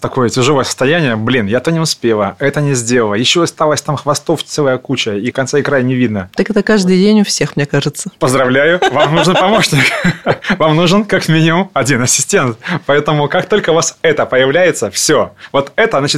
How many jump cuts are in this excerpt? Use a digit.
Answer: 0